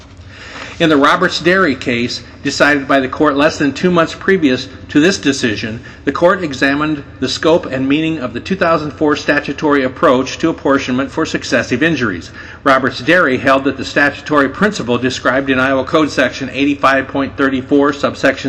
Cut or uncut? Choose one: uncut